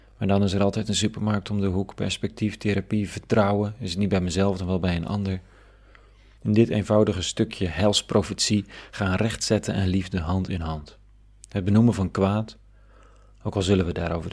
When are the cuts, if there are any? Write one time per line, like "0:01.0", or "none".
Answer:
0:03.1
0:06.4